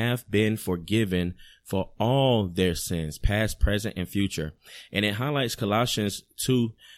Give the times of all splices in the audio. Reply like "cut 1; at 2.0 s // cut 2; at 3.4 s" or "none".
none